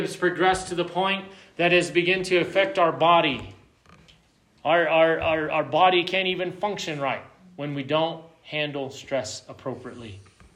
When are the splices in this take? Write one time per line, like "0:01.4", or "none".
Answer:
none